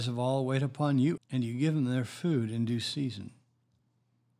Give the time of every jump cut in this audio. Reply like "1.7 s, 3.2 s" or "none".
1.2 s